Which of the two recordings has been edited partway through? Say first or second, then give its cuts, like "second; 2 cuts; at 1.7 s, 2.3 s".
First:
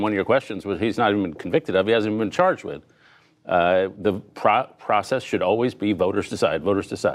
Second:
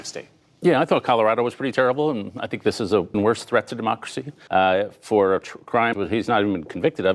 second; 3 cuts; at 3.1 s, 4.5 s, 5.9 s